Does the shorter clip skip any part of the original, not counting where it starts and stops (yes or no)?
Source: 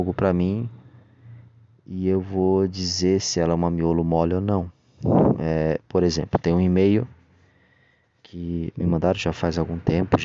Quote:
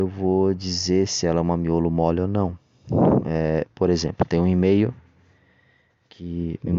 no